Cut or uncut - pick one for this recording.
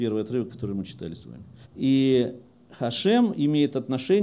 cut